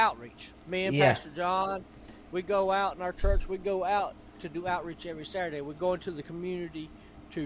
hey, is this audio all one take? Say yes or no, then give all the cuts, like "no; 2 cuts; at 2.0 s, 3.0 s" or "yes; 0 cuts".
yes; 0 cuts